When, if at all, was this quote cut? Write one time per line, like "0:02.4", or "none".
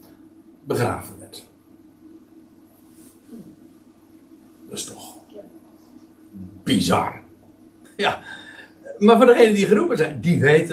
0:07.8